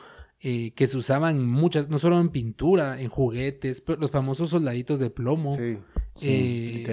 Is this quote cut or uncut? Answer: uncut